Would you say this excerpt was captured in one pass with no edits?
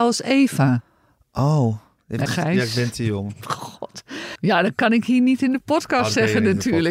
no; 2 cuts; at 2.3 s, 4.4 s

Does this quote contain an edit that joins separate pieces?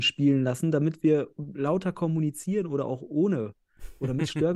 no; 0 cuts

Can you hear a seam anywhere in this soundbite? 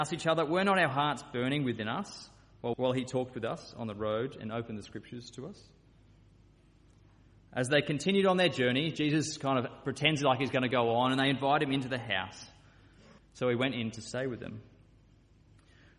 yes; 2 cuts; at 2.7 s, 13.2 s

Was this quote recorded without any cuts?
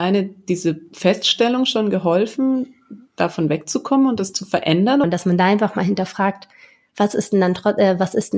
no; 1 cut; at 5.0 s

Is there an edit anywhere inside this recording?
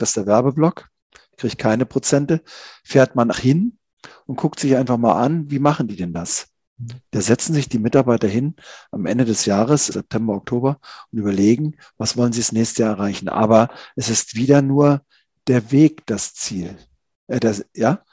yes; 2 cuts; at 3.3 s, 9.9 s

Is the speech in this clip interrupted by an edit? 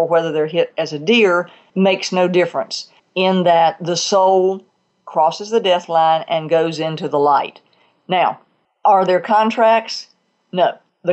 no; 0 cuts

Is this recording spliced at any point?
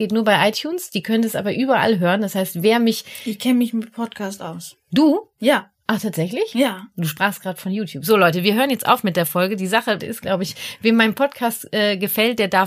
yes; 1 cut; at 10.0 s

